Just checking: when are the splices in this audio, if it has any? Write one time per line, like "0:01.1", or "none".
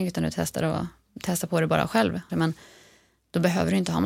0:02.3